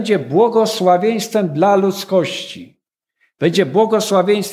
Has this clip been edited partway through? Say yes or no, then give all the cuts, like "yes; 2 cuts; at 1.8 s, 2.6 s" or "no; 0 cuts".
no; 0 cuts